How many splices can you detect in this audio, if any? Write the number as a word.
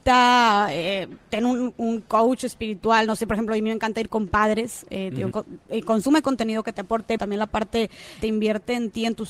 three